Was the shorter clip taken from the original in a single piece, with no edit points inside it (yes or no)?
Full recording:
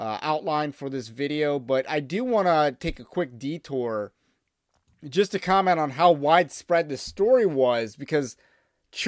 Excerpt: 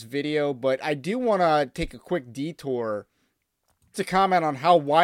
no